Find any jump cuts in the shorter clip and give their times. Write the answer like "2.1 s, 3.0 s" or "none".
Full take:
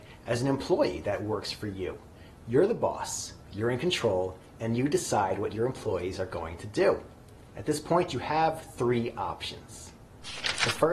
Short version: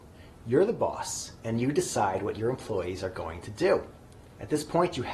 1.4 s